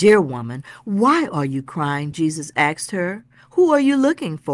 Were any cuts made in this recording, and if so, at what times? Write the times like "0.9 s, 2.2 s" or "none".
none